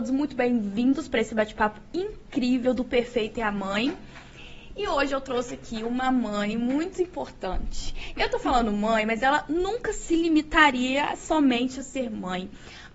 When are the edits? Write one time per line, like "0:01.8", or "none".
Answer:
none